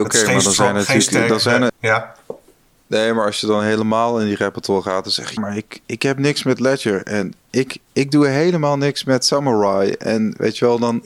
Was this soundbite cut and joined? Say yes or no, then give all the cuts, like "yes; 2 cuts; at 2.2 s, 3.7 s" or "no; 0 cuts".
yes; 2 cuts; at 1.7 s, 5.4 s